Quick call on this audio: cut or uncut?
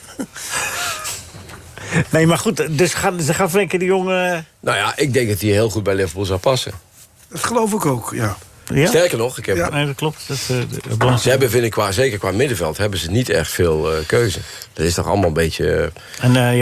cut